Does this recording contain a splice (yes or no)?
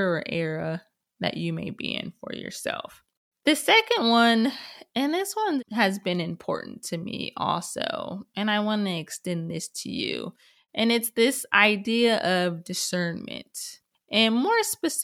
no